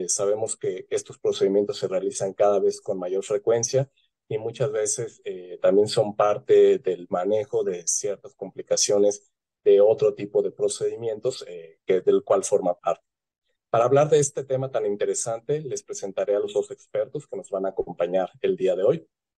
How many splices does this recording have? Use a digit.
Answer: 0